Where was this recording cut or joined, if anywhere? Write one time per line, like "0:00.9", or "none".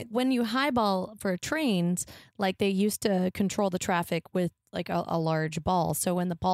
none